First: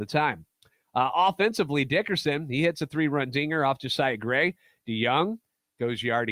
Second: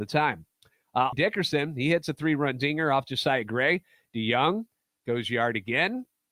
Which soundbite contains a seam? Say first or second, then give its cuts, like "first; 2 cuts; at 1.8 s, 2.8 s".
second; 1 cut; at 1.1 s